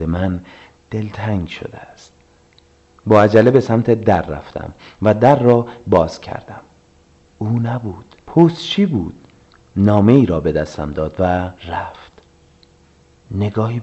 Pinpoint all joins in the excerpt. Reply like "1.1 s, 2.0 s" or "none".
8.2 s, 11.6 s